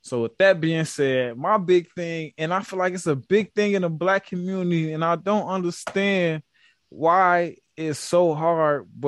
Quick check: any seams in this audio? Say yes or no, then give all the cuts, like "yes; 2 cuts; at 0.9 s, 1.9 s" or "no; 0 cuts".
no; 0 cuts